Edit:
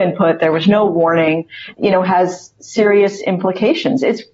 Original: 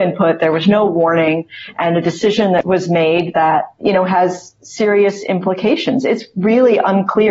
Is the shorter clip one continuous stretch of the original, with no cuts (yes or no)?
no